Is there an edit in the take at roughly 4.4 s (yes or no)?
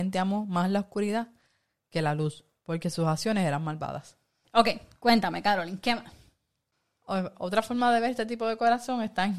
yes